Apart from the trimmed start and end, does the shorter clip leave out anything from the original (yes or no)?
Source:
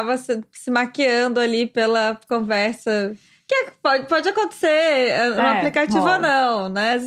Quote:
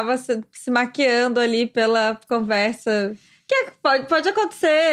no